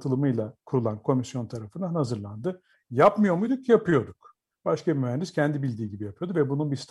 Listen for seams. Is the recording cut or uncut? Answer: cut